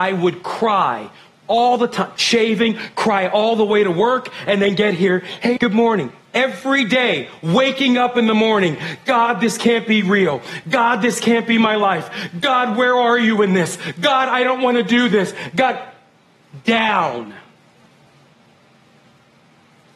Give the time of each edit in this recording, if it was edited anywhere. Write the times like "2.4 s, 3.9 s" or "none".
2.2 s, 5.6 s